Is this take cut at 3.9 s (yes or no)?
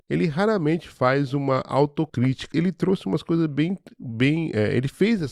no